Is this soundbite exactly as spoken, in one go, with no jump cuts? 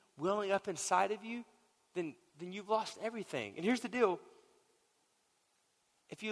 yes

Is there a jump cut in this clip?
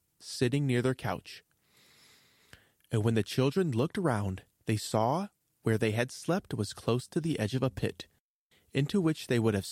yes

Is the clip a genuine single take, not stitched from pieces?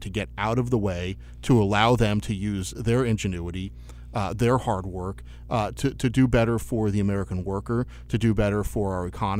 yes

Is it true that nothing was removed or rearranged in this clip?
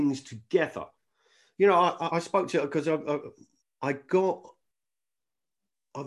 no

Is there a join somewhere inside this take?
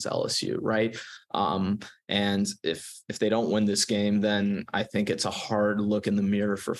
no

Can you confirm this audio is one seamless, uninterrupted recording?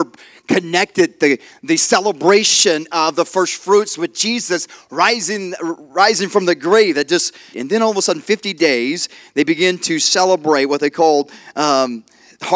no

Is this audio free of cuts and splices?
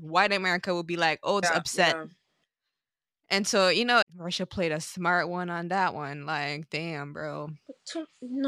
no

